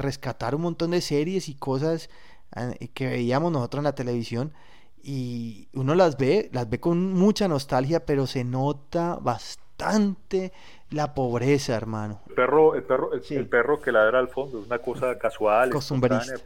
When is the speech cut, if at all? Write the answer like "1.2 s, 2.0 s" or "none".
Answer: 12.3 s